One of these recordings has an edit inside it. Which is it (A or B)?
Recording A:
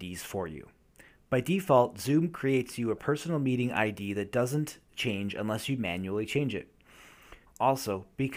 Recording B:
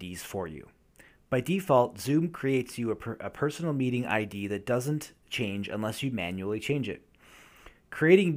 A